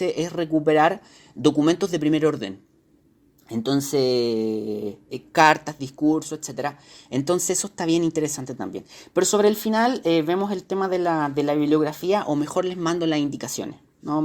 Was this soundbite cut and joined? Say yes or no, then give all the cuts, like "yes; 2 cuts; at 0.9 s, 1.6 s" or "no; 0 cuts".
no; 0 cuts